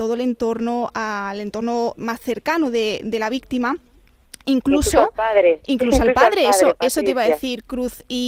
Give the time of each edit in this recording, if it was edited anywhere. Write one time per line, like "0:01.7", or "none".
0:02.0